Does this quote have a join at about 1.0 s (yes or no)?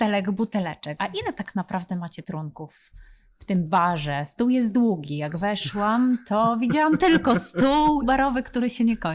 yes